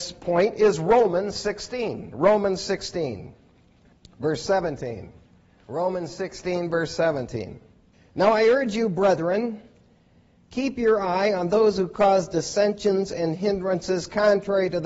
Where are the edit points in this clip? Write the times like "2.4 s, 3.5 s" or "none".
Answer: none